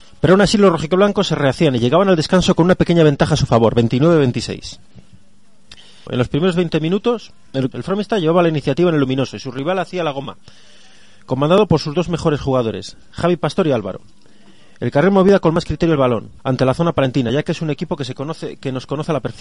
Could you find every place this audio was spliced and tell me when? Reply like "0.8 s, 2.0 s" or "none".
6.1 s, 7.7 s, 16.4 s